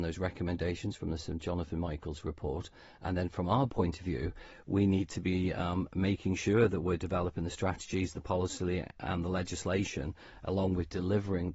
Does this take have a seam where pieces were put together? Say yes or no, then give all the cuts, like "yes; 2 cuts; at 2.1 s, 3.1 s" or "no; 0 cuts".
no; 0 cuts